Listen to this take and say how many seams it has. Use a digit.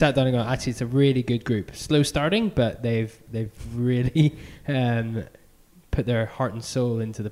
0